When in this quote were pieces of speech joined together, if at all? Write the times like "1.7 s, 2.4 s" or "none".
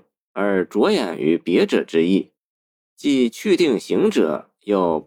none

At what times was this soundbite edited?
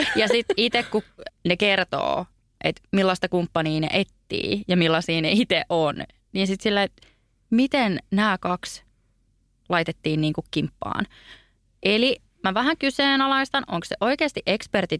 1.3 s

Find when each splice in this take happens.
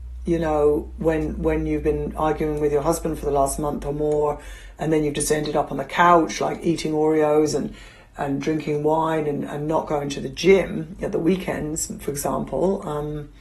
none

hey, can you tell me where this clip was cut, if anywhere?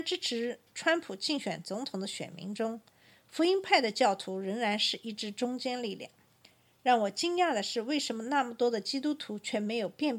none

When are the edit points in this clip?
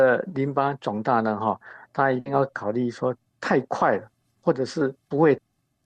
none

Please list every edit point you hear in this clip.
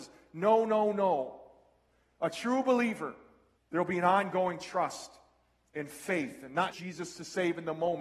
3.6 s, 6.7 s

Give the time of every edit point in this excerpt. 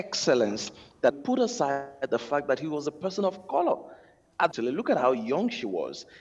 1.1 s, 4.5 s

